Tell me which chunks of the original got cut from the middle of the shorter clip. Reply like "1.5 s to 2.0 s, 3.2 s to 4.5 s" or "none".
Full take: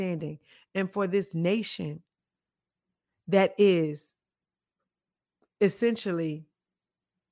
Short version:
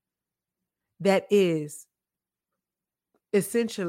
none

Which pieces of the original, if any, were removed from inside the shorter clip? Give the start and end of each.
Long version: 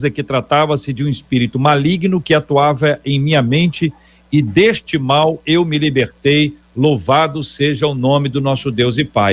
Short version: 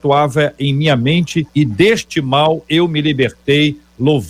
3.9 s to 4.3 s

